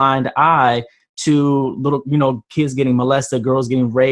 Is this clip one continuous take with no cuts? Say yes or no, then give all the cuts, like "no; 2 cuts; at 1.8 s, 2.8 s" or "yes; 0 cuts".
yes; 0 cuts